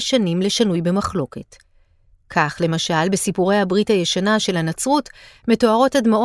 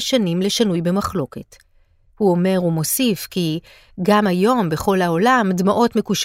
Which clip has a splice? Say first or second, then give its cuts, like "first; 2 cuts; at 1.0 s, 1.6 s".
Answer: second; 1 cut; at 2.1 s